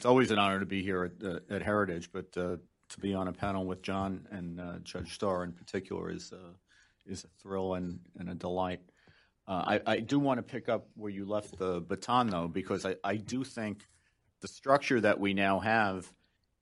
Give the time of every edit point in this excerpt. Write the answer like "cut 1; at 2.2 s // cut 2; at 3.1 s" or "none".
none